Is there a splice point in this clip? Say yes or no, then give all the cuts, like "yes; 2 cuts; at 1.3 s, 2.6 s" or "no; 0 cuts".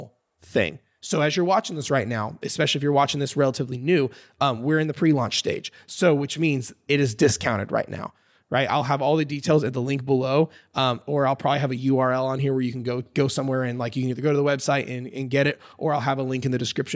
no; 0 cuts